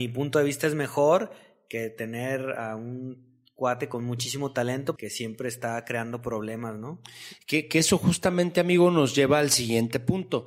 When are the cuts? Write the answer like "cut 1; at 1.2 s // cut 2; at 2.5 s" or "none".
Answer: cut 1; at 5.0 s